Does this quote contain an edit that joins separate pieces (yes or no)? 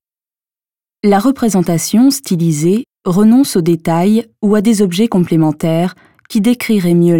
no